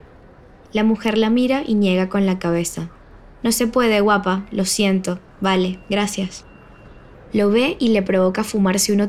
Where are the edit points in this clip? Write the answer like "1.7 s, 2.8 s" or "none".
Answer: 5.3 s, 7.1 s